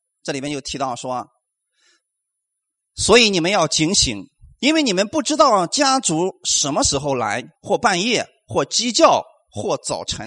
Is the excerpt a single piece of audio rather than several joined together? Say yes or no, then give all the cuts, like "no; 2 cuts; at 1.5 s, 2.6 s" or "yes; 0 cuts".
no; 1 cut; at 7.5 s